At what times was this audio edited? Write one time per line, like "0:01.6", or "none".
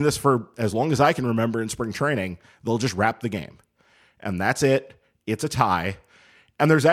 none